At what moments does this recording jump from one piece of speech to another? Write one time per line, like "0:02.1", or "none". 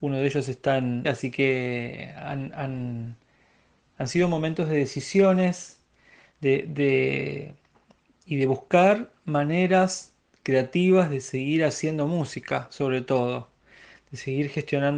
0:01.0